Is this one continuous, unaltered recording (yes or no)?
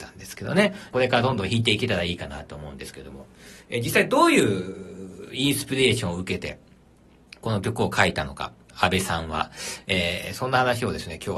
no